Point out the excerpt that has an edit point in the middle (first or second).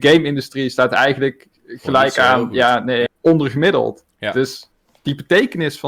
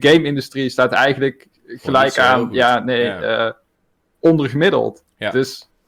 first